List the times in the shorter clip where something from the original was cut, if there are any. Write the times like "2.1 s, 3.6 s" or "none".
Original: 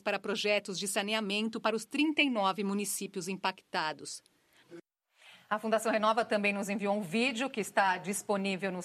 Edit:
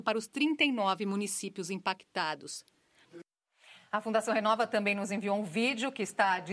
none